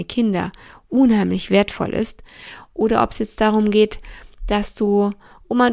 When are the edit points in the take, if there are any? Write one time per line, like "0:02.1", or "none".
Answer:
none